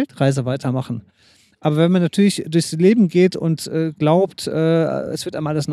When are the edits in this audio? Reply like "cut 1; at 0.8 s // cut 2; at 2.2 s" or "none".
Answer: none